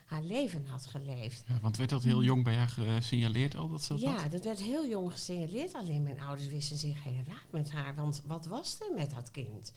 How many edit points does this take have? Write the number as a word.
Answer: zero